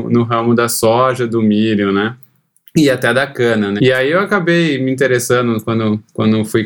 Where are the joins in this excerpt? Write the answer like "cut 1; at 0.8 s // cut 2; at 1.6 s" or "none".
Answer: cut 1; at 3.8 s